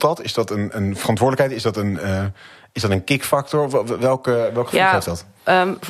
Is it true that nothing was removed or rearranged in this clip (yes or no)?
yes